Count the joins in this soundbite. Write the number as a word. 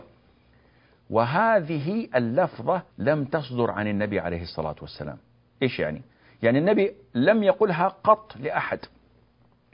one